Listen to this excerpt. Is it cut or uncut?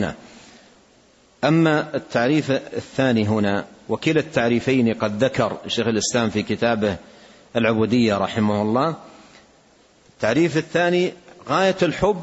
uncut